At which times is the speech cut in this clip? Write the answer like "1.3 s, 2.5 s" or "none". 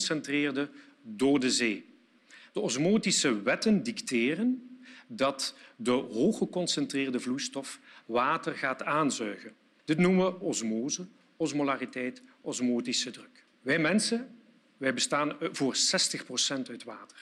9.8 s, 13.5 s